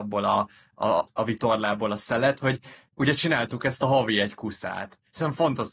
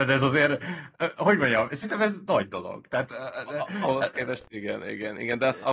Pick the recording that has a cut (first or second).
first